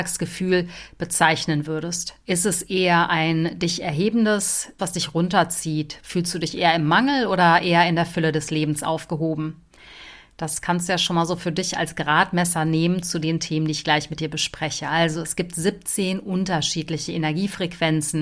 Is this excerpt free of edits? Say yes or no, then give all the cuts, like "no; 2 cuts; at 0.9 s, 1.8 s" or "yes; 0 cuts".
no; 2 cuts; at 2.2 s, 4.8 s